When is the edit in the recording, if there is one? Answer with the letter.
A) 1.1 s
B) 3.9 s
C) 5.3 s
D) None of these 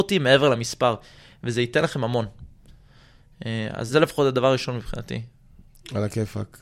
B